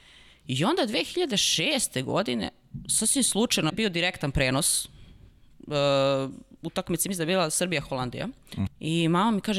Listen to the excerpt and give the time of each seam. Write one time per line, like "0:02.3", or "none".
0:03.7
0:08.7